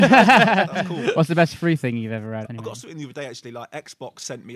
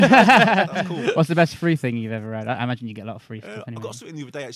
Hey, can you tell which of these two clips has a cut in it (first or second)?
first